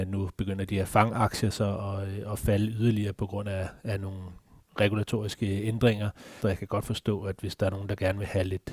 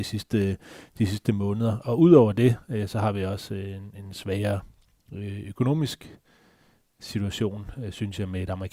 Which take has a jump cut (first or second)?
first